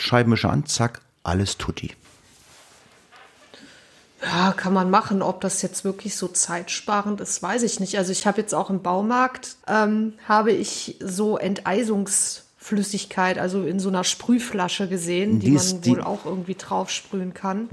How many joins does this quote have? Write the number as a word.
one